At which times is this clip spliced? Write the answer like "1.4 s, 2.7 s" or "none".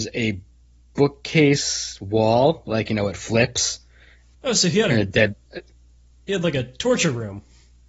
4.3 s